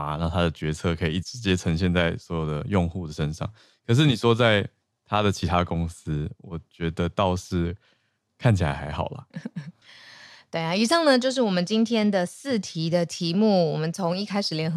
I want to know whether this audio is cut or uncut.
cut